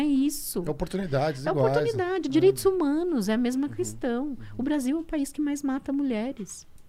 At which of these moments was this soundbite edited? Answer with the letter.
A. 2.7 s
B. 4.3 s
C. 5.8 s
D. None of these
D